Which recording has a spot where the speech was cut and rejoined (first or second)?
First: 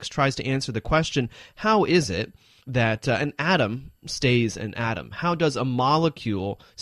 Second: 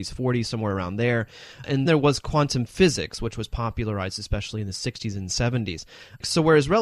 second